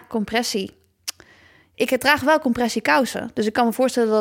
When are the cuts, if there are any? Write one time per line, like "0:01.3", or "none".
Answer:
0:01.7